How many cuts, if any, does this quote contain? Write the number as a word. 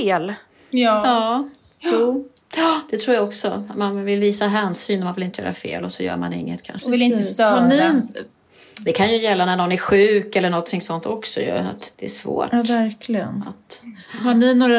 two